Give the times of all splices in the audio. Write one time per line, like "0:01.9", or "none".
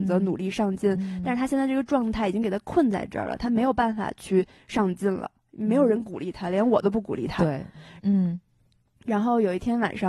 0:08.0